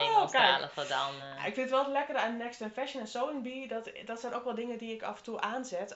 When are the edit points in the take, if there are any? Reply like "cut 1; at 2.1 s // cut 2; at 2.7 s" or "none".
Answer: none